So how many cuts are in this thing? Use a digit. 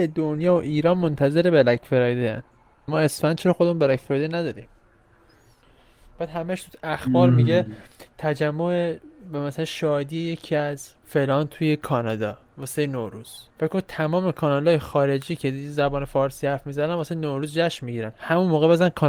3